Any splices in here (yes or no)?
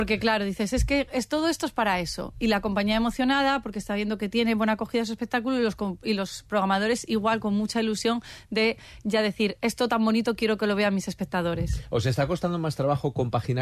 no